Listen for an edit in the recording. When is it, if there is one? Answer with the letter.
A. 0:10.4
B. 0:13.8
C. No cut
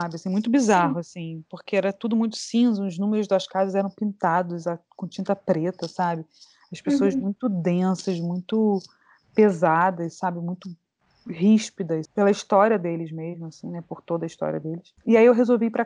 C